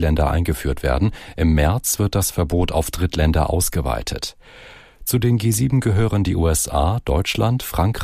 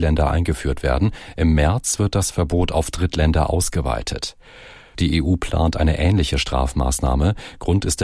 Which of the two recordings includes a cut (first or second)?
second